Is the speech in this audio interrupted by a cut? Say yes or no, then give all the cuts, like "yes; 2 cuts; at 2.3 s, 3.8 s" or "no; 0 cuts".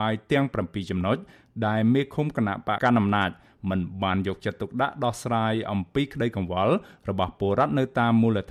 yes; 1 cut; at 2.8 s